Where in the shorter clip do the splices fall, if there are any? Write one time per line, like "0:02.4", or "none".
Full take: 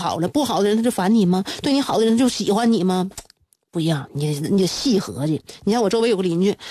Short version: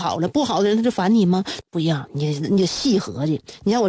0:01.6